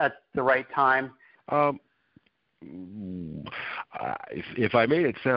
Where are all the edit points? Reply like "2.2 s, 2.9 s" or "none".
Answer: 1.3 s